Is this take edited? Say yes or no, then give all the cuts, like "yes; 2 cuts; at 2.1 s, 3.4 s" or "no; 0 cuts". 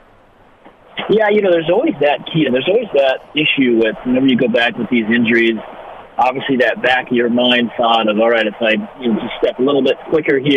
yes; 1 cut; at 2.4 s